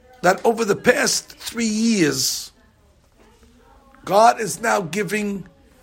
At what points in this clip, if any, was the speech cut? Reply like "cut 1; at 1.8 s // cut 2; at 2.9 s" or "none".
none